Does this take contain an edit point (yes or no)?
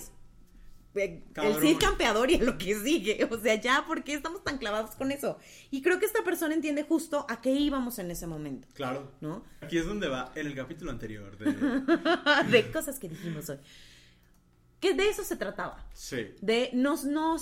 yes